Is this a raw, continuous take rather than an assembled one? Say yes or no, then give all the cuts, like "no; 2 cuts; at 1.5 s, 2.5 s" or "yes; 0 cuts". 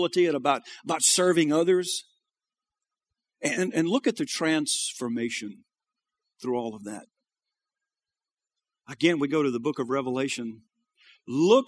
yes; 0 cuts